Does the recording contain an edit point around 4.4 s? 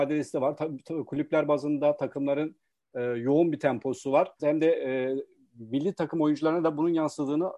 yes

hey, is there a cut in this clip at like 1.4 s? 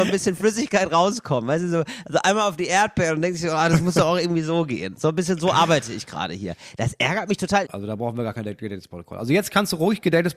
no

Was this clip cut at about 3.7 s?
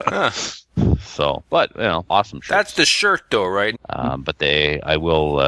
yes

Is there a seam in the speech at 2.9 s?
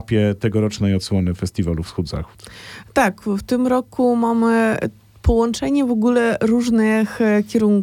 no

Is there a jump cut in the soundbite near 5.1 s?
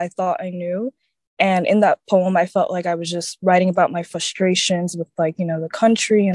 no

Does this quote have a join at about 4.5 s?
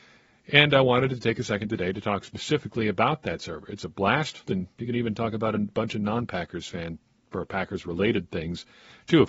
yes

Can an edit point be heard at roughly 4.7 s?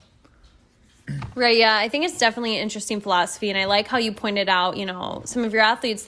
no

